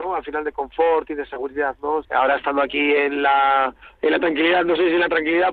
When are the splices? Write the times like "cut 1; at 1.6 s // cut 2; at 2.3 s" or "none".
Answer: cut 1; at 2.0 s